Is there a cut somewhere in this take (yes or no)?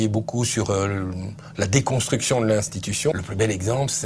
yes